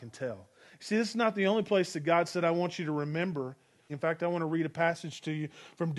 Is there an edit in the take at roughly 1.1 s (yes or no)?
no